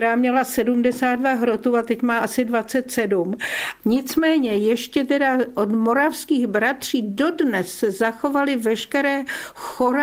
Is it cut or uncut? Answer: cut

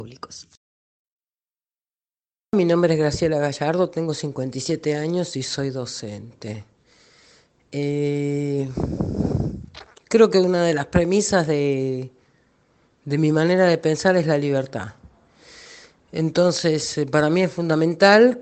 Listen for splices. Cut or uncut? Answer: uncut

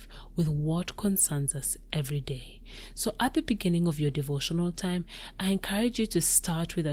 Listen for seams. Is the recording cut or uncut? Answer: uncut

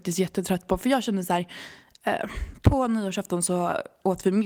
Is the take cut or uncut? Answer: uncut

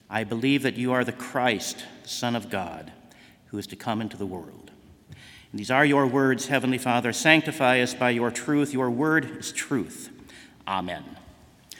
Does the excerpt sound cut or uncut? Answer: uncut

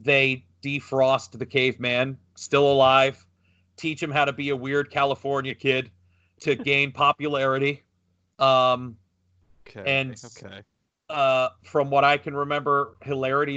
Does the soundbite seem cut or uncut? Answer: uncut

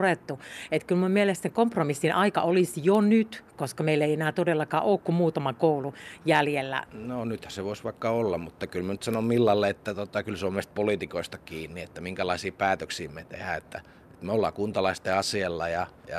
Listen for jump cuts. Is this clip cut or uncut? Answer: cut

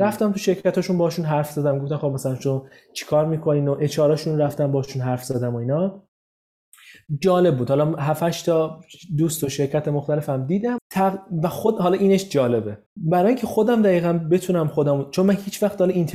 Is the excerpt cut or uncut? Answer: cut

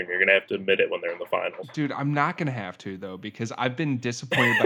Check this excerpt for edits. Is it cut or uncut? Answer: uncut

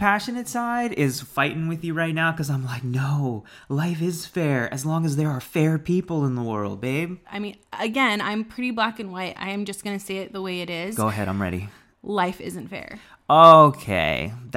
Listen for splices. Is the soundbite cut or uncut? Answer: cut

